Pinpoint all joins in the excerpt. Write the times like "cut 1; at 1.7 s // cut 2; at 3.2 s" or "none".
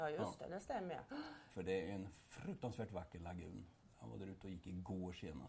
cut 1; at 1.5 s